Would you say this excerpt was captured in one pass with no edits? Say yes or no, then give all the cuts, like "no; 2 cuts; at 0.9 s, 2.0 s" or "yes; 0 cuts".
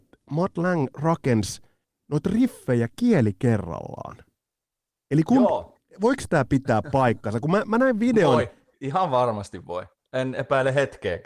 no; 1 cut; at 8.7 s